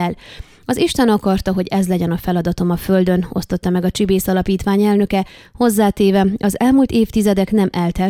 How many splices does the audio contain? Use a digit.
0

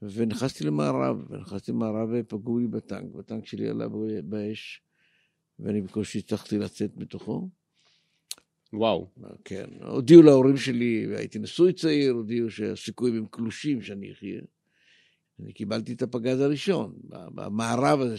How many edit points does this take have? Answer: 2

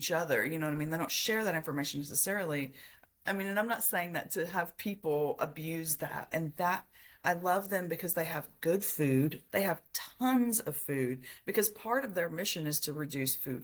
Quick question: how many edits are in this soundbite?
2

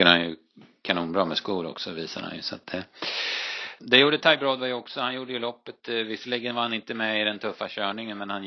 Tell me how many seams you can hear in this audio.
1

